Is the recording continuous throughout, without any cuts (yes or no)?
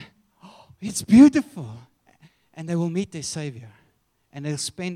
yes